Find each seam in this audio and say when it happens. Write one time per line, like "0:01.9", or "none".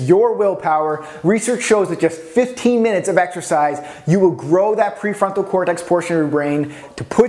none